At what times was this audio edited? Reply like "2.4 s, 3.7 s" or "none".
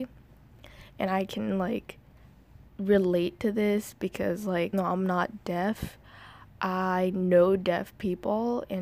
2.7 s, 4.7 s